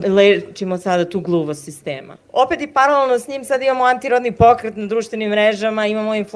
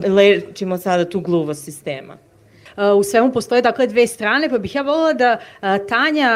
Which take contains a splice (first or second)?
first